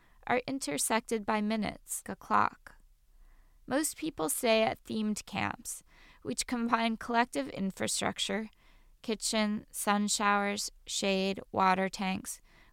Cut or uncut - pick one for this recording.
cut